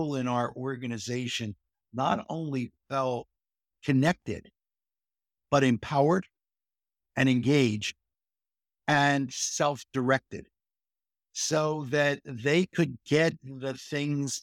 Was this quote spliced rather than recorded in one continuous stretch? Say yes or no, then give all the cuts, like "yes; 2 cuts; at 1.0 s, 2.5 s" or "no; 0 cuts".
no; 0 cuts